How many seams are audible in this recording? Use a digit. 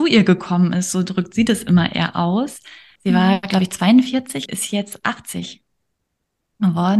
2